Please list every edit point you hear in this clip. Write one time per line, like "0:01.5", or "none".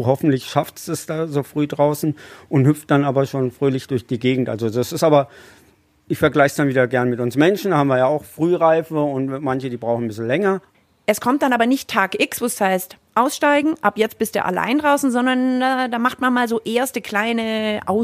none

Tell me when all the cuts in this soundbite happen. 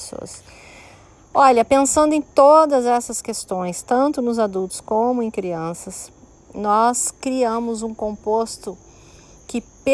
none

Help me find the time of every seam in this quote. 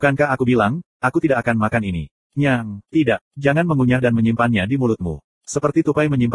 0:02.9

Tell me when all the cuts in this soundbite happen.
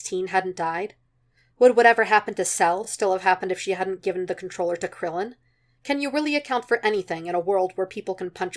none

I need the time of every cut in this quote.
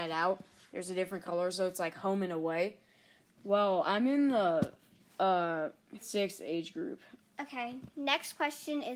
0:03.2
0:06.0
0:07.2

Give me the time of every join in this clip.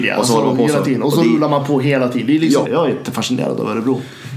0:02.7

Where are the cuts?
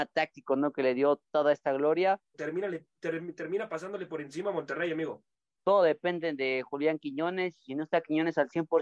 0:02.3
0:05.6

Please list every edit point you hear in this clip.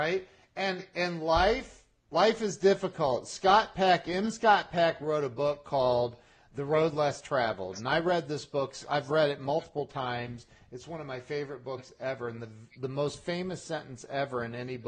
none

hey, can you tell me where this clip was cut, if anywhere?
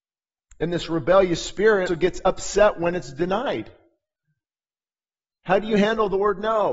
0:01.9

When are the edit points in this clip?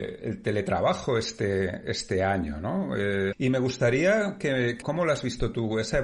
0:03.3
0:04.8

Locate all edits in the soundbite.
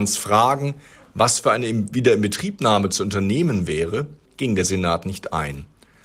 0:04.3

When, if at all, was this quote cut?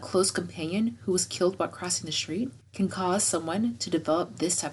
0:02.9

